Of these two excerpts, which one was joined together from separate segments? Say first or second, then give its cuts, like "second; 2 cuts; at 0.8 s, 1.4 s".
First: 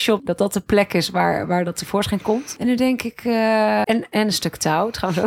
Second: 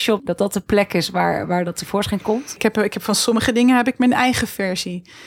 first; 2 cuts; at 2.6 s, 3.8 s